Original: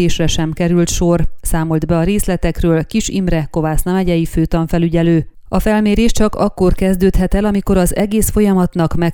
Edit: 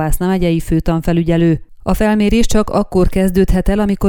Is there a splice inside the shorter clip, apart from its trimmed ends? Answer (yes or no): no